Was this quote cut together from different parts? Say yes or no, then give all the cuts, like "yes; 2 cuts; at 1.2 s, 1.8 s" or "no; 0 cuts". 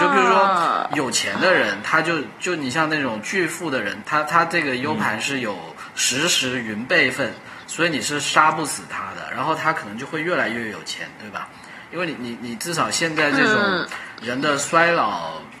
yes; 1 cut; at 4.0 s